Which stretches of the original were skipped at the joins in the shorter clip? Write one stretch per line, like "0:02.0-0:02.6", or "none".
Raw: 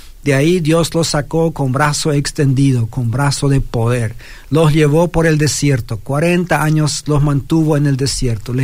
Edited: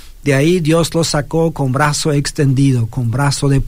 none